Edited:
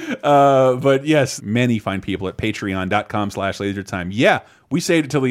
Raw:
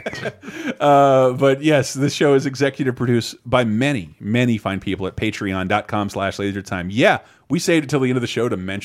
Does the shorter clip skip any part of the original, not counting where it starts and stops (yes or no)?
yes